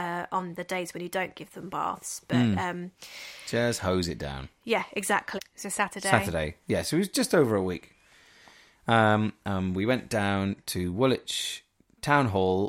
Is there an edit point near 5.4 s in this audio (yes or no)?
yes